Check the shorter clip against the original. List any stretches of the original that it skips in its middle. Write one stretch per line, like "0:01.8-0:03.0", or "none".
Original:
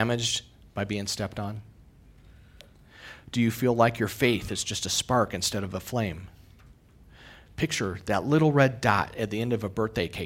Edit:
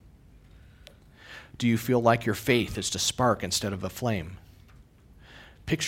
0:04.6-0:04.8